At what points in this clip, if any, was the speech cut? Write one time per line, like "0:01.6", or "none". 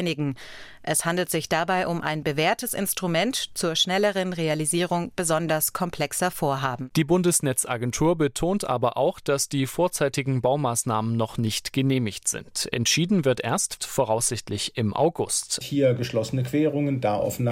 0:13.8
0:15.6